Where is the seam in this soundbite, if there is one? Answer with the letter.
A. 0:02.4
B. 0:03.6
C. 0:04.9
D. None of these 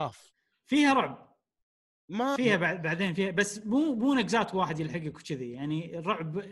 A